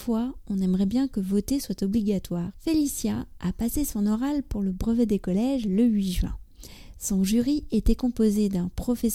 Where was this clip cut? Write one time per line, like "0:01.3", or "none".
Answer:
0:02.5